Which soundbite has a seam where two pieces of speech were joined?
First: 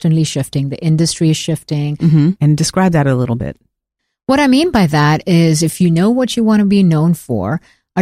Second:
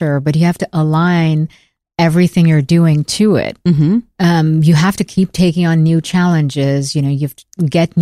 first; 1 cut; at 2.4 s

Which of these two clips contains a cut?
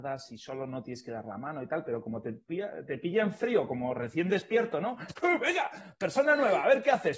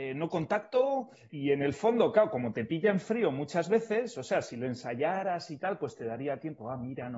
second; 1 cut; at 1.3 s

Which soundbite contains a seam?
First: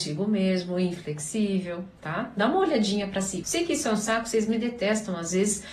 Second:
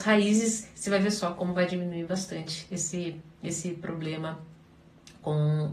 first; 2 cuts; at 2.0 s, 3.4 s

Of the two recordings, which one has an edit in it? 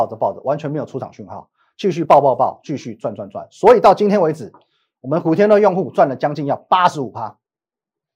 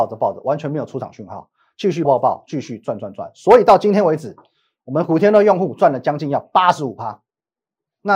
second; 1 cut; at 2.0 s

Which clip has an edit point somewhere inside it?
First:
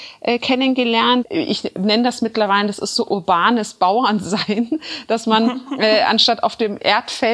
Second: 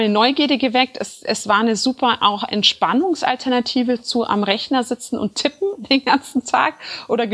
first; 1 cut; at 1.2 s

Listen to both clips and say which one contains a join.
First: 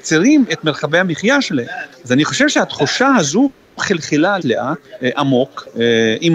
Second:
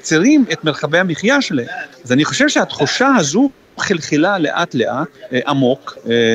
first; 1 cut; at 4.4 s

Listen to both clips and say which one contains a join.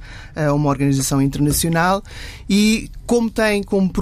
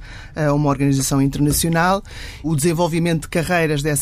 second; 1 cut; at 2.4 s

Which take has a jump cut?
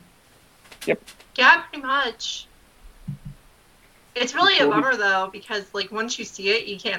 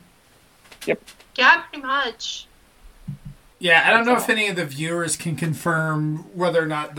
second; 1 cut; at 3.5 s

